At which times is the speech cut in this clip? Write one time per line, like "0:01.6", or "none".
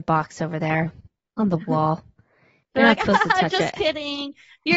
none